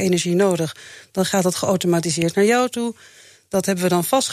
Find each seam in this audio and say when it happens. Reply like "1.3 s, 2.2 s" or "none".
none